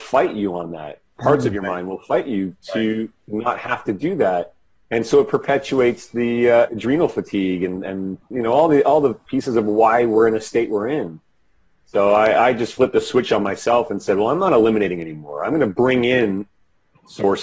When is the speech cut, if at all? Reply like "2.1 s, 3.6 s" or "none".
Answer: 8.3 s